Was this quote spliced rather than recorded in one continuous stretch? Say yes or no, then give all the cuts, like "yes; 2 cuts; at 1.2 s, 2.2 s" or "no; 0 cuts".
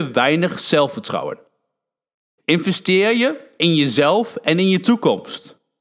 yes; 1 cut; at 2.4 s